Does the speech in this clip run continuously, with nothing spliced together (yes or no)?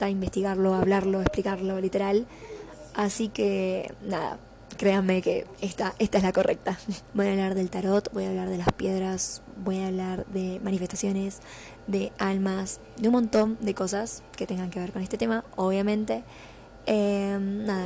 no